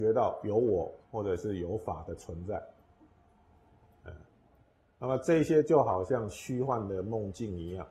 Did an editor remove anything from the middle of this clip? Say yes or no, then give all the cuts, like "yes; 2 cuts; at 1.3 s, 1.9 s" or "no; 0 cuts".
yes; 1 cut; at 1.0 s